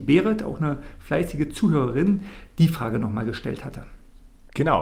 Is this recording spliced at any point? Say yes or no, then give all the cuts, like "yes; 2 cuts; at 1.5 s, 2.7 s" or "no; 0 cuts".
no; 0 cuts